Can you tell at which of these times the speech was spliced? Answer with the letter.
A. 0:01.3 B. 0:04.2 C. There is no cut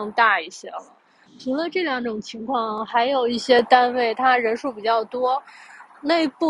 A